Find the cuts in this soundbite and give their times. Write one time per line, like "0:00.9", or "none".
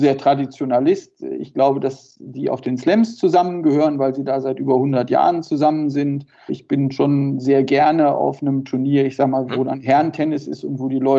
0:06.5
0:09.5